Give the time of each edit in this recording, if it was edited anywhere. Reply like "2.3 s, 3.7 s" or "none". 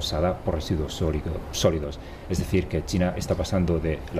none